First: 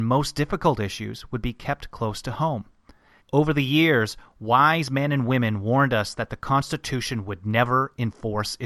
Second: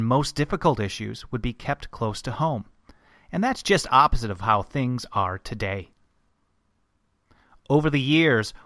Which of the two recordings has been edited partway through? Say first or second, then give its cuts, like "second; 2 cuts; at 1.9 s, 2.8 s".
first; 1 cut; at 3.2 s